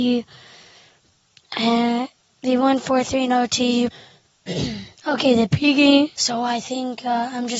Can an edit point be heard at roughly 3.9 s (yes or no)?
yes